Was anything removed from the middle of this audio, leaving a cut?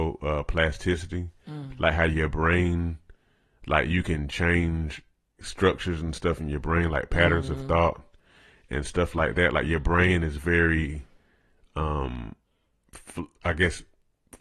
yes; 1 cut; at 5.4 s

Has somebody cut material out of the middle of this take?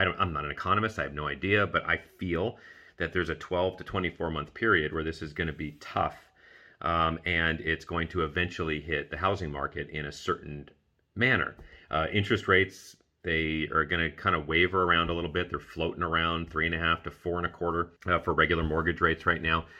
yes; 1 cut; at 18.0 s

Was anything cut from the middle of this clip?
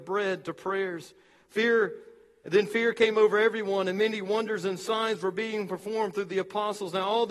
no; 0 cuts

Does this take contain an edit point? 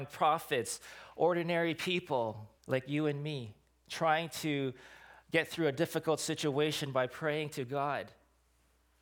yes; 1 cut; at 2.6 s

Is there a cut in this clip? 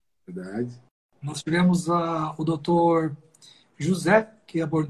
no; 0 cuts

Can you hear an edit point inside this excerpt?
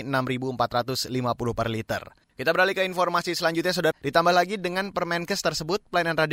yes; 2 cuts; at 2.2 s, 3.9 s

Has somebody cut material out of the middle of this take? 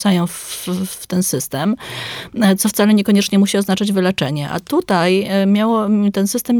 no; 0 cuts

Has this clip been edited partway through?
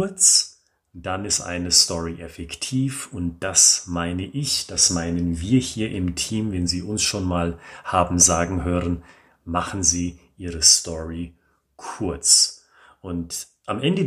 no; 0 cuts

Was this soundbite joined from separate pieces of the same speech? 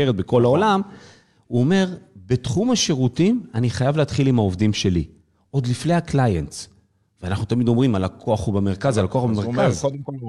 no; 0 cuts

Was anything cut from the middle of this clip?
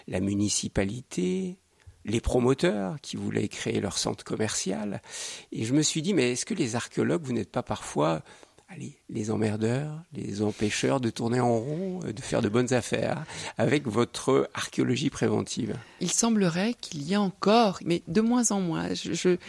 yes; 2 cuts; at 16.0 s, 17.8 s

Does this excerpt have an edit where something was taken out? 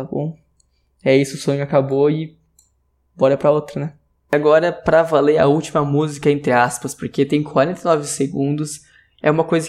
no; 0 cuts

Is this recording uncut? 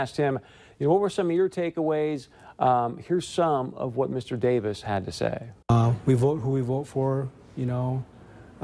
no; 1 cut; at 5.6 s

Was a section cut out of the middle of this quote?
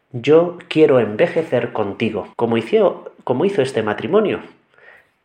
yes; 1 cut; at 2.3 s

